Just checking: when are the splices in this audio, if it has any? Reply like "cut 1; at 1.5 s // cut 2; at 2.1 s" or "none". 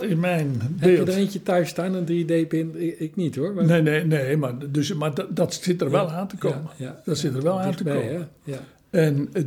none